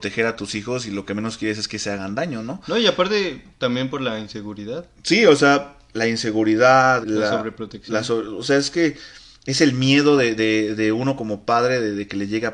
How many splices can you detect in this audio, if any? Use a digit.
1